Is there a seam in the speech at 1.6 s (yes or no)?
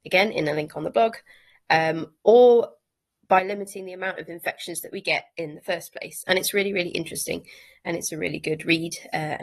no